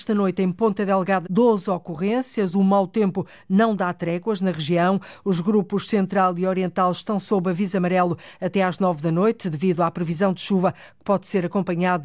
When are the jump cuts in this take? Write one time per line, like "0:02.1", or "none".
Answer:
0:01.2